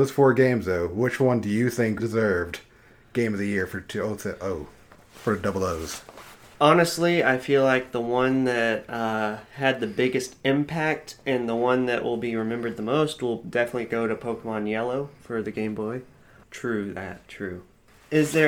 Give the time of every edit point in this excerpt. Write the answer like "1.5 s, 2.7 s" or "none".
2.0 s, 16.4 s